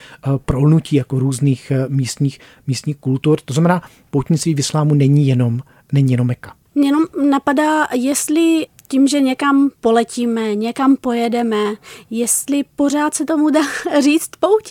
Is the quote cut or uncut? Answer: uncut